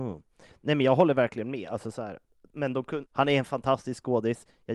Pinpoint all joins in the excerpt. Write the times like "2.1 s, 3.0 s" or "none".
3.0 s